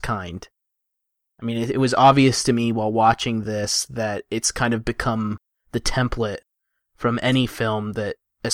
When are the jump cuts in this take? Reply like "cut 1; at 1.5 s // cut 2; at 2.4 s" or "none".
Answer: none